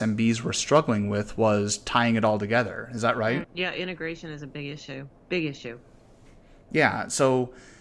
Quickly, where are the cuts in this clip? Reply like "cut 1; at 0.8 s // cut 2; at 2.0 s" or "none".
cut 1; at 3.4 s